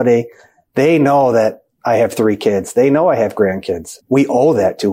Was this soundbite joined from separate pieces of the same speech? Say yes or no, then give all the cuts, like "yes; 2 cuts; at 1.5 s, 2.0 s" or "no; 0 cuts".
yes; 1 cut; at 4.0 s